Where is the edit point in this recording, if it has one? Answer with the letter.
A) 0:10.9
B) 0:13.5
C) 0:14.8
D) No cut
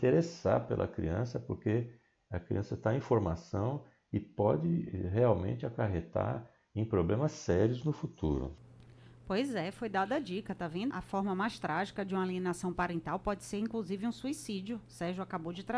A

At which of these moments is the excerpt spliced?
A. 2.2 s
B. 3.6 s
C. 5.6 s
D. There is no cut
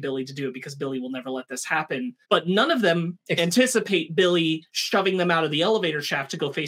A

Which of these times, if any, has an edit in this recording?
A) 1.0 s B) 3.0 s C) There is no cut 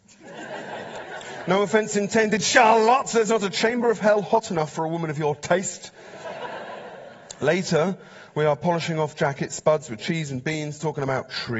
A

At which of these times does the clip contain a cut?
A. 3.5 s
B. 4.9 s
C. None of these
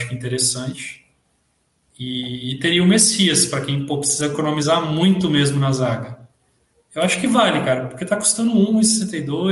C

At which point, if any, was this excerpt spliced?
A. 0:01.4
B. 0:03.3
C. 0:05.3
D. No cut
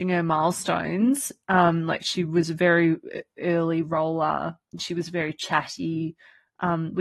D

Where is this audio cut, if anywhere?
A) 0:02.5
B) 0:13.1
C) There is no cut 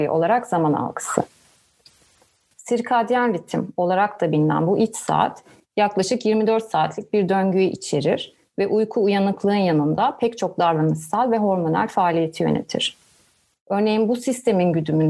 A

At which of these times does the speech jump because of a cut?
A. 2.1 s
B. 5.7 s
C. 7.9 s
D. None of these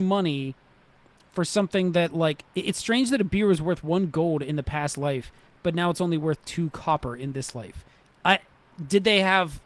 D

